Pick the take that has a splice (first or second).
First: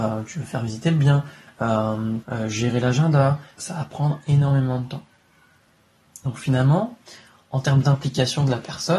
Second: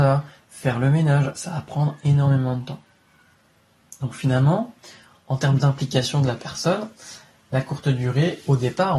first